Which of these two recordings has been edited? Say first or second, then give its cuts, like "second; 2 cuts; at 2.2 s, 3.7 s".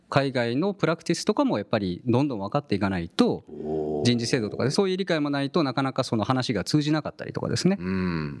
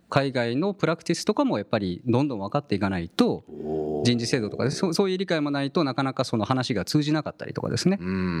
first; 1 cut; at 4.7 s